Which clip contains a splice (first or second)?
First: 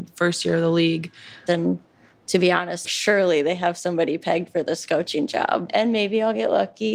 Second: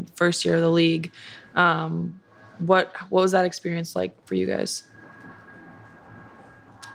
first